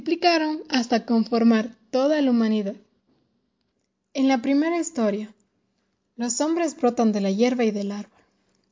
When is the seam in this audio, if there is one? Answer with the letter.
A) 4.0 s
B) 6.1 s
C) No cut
C